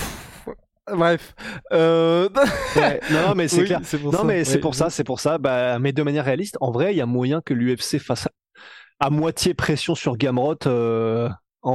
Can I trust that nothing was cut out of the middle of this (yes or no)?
yes